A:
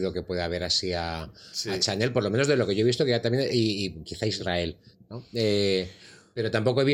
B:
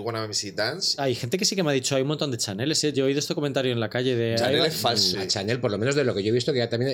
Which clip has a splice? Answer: B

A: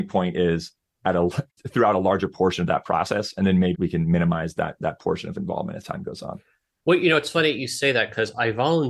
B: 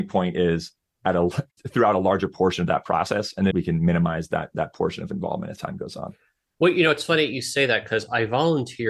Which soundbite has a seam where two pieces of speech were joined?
B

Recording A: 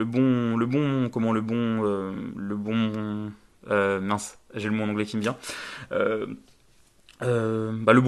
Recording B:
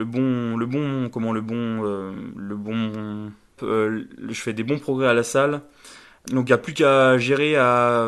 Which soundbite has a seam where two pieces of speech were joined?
B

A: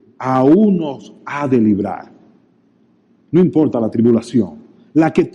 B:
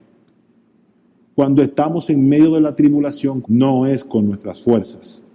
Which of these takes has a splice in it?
B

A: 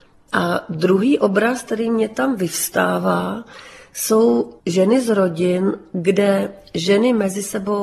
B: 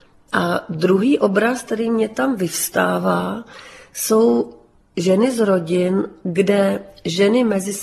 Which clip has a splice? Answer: A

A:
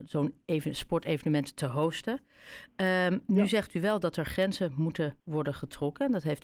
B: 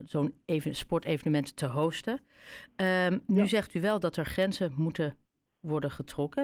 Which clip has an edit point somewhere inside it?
A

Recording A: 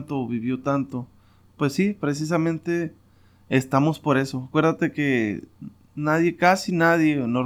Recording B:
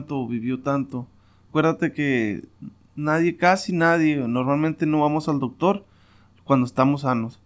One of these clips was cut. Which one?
B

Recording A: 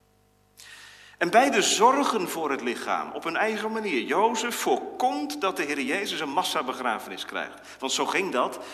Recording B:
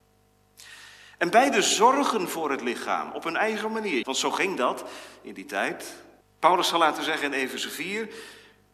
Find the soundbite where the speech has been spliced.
B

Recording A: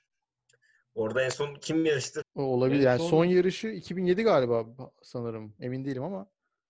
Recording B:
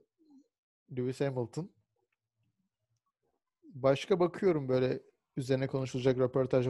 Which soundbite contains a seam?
A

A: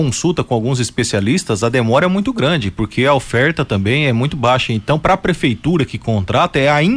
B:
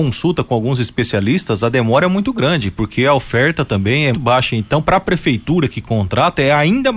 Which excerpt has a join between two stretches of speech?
B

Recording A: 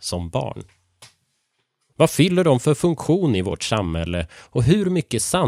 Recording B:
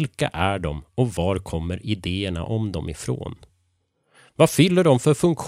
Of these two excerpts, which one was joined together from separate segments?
A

